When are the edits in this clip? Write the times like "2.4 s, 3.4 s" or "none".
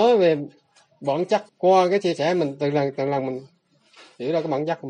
1.5 s